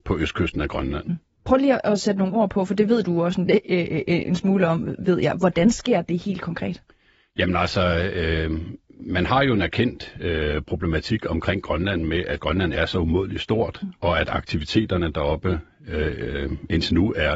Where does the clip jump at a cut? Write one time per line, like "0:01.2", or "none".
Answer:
none